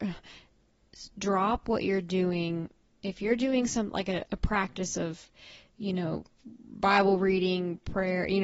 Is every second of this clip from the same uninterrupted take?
no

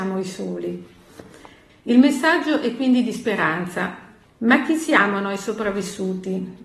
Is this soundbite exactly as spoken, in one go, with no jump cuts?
no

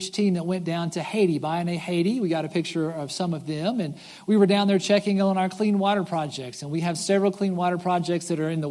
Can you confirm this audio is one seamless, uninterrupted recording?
yes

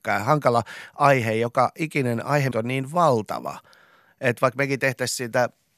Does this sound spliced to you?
yes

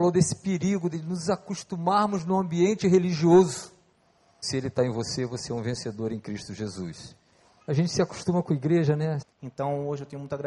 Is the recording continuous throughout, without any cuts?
no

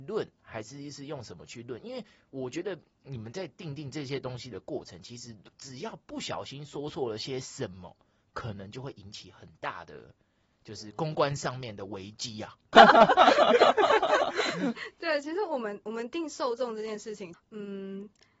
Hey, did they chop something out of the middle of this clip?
yes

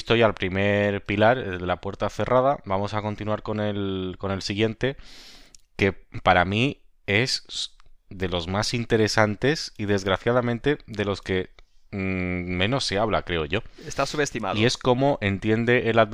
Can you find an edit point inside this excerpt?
no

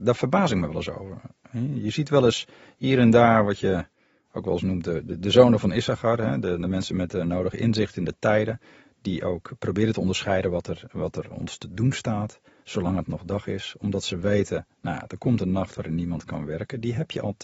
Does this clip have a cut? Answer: no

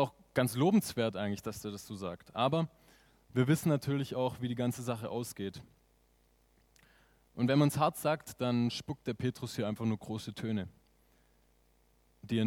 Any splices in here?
no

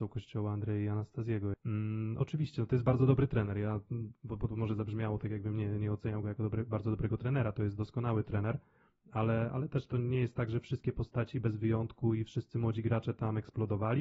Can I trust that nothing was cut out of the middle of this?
no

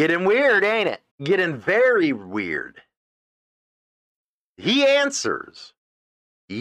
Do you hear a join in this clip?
yes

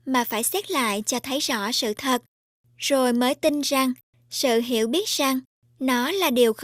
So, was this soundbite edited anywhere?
no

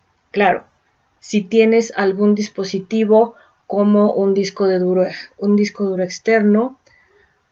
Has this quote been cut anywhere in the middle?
no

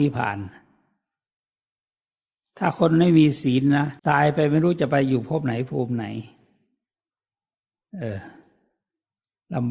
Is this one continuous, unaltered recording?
no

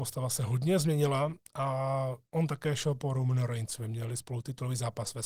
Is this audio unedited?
yes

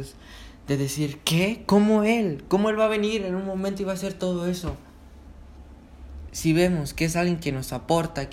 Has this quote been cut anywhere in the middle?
yes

